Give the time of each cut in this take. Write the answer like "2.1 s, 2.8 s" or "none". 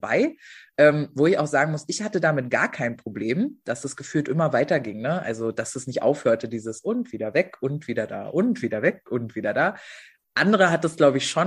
none